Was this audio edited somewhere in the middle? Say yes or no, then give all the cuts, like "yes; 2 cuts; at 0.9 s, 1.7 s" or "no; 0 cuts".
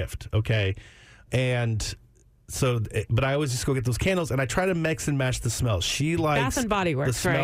yes; 1 cut; at 1.3 s